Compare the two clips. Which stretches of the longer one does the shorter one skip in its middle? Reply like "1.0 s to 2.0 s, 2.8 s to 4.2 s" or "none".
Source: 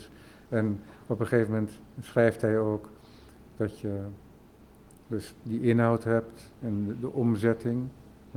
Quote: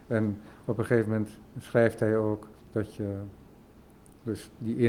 3.0 s to 3.5 s